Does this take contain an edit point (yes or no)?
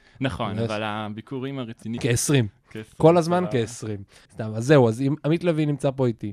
yes